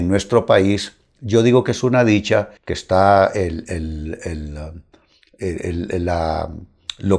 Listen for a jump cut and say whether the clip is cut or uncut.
cut